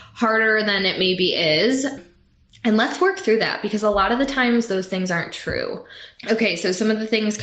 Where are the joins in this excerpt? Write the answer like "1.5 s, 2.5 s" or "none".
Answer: none